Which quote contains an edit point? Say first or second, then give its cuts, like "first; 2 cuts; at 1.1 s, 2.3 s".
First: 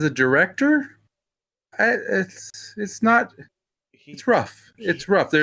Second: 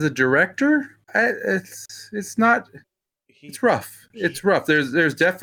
second; 1 cut; at 1.0 s